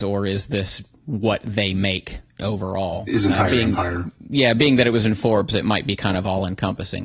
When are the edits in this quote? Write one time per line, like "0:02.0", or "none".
0:02.3